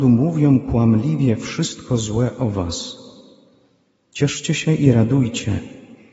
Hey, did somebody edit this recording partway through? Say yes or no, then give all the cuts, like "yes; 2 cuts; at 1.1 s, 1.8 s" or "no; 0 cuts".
no; 0 cuts